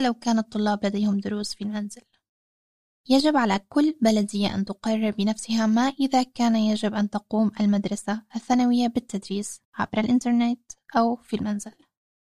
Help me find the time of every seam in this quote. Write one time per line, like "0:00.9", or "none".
0:03.0
0:09.6